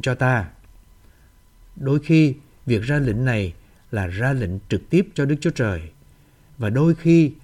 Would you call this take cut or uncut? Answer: uncut